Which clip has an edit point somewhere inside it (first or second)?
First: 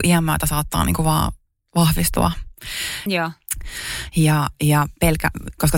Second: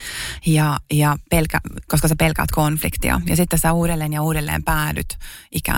first